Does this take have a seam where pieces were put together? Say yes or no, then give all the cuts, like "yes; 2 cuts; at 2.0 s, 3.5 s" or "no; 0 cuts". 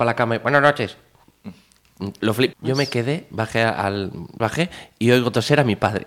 yes; 2 cuts; at 2.5 s, 4.4 s